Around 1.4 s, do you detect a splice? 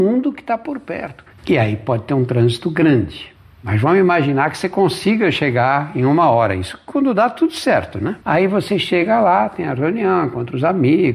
yes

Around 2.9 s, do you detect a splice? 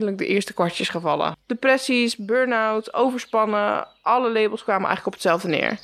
no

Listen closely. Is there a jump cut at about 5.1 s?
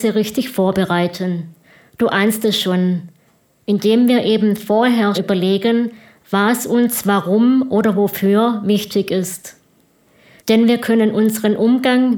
yes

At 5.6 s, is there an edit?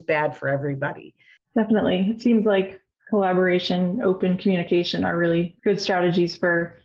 yes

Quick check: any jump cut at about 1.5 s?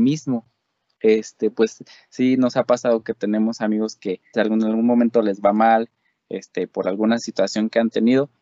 no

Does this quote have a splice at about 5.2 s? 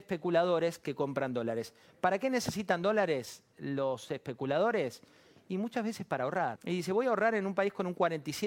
no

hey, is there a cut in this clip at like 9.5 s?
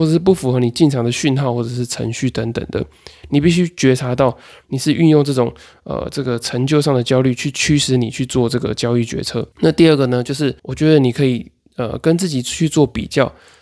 yes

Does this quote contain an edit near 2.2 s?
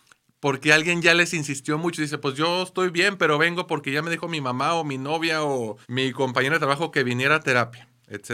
no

